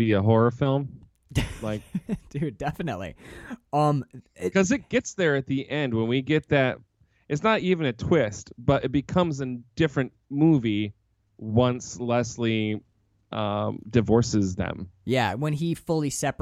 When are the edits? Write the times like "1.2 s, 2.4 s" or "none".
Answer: none